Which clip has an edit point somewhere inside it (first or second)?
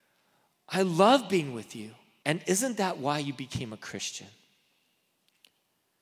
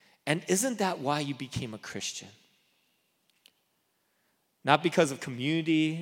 first